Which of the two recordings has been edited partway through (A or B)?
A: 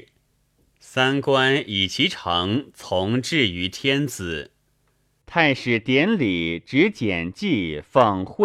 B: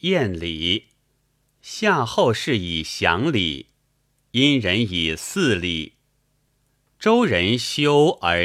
A